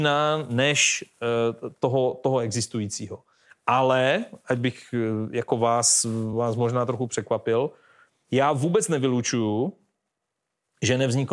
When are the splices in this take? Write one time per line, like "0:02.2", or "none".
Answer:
none